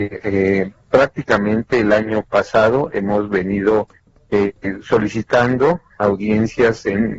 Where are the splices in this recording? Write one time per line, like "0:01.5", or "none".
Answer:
none